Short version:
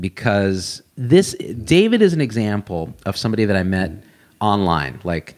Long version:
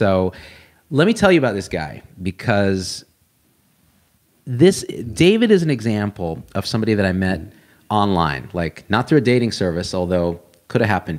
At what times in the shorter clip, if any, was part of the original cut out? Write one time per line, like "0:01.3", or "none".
0:00.9